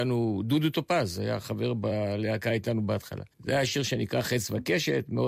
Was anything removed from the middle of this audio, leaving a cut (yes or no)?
yes